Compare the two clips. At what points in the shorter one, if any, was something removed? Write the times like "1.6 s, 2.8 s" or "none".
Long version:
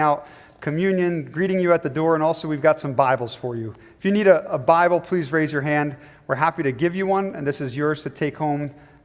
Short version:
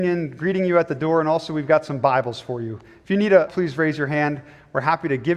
3.5 s